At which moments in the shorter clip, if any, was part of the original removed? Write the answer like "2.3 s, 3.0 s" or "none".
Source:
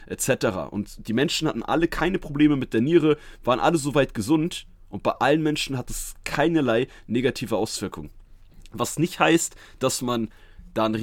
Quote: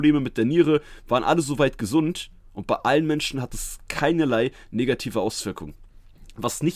none